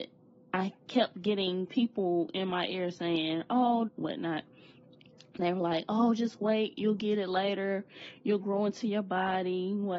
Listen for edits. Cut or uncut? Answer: cut